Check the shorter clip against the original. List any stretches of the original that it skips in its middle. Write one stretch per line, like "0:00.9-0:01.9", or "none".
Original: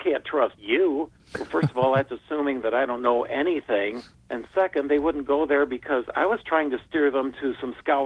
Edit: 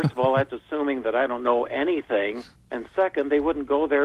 none